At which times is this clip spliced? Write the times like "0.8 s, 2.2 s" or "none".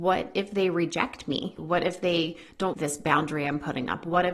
1.6 s, 2.7 s